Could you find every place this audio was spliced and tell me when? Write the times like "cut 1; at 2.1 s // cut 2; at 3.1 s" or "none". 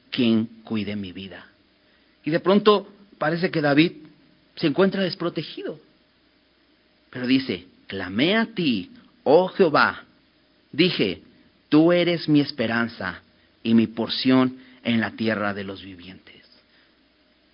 none